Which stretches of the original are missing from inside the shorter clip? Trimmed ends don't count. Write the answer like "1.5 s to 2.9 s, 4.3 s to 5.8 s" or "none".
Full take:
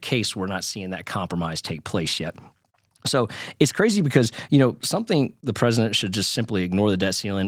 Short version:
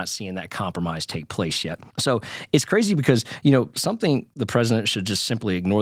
2.4 s to 3.0 s